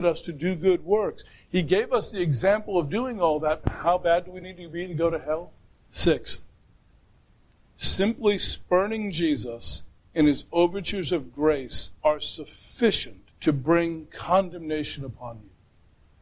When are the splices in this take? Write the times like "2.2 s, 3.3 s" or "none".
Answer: 3.6 s, 5.7 s, 13.3 s